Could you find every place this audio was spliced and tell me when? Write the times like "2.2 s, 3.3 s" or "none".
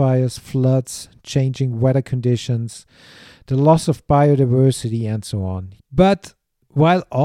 5.8 s